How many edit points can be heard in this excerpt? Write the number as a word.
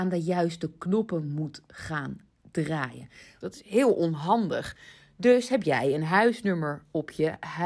one